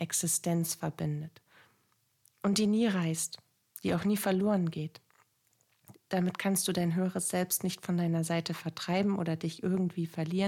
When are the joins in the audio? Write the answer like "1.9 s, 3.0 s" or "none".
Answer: 5.9 s